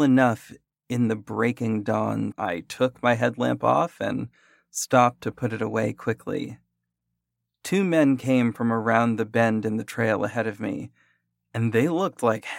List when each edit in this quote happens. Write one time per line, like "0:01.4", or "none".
0:02.3

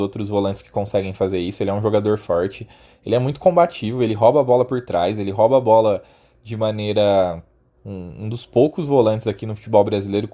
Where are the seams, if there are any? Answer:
0:07.8

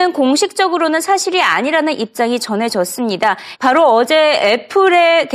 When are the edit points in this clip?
0:03.6

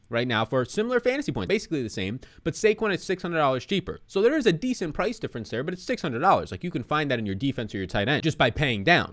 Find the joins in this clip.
0:01.5

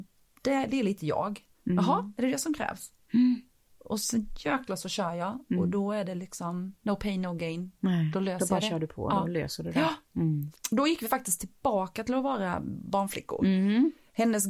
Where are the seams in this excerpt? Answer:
0:06.8
0:10.5

